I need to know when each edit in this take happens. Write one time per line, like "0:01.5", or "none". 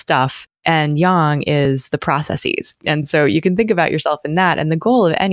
none